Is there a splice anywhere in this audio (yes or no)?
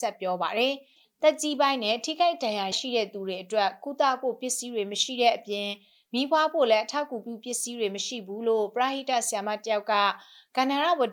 yes